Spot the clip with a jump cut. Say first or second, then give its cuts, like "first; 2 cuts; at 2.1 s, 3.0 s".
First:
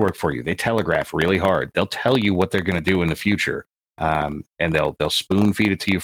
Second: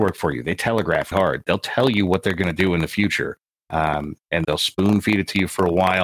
second; 2 cuts; at 1.1 s, 4.4 s